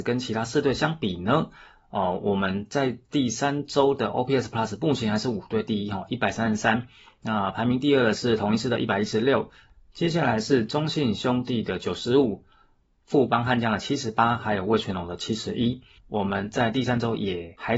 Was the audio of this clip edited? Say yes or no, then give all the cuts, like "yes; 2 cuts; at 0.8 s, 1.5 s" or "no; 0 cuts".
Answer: yes; 1 cut; at 16.0 s